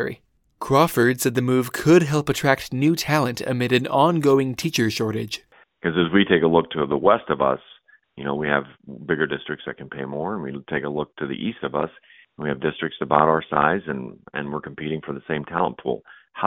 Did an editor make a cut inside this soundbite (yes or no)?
no